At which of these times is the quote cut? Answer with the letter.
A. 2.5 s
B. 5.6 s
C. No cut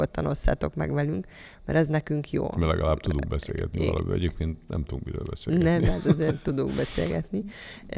C